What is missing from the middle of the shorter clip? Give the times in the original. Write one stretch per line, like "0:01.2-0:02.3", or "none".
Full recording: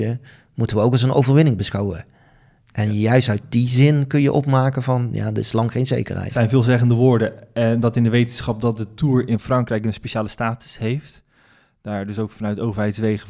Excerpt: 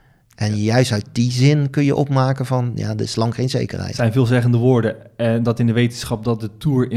none